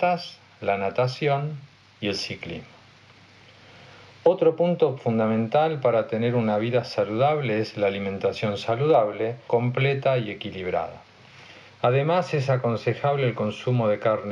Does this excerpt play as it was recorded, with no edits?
no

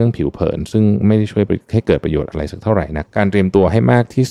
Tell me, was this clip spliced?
yes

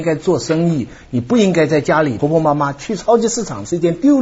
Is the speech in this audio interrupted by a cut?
yes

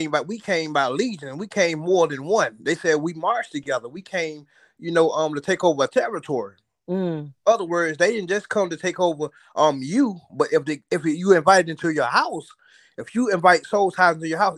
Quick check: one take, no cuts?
yes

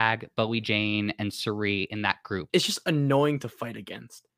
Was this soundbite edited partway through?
yes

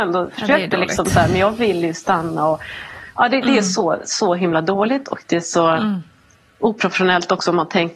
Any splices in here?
no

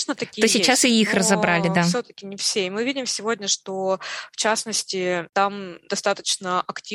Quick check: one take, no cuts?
yes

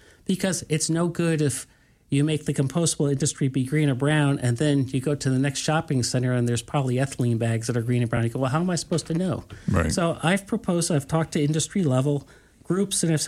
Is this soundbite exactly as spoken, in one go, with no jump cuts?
yes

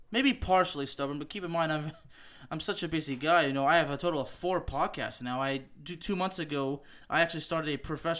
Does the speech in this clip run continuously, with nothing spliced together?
yes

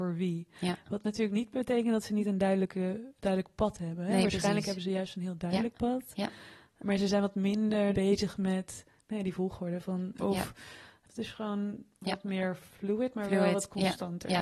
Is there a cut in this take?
yes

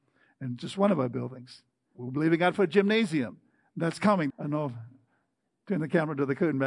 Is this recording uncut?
no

